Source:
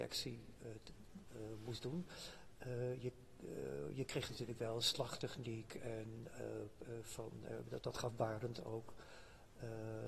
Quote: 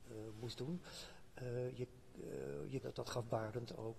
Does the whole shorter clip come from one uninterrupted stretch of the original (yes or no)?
no